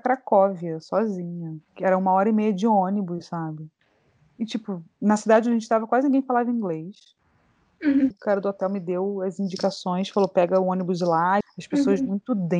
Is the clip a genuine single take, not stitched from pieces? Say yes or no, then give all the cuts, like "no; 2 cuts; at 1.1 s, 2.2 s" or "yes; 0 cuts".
no; 2 cuts; at 8.1 s, 11.4 s